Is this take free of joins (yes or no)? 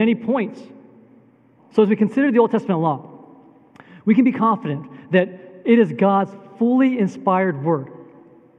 no